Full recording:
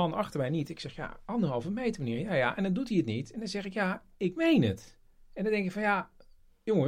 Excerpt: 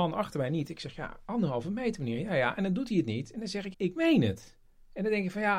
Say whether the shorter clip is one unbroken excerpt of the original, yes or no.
no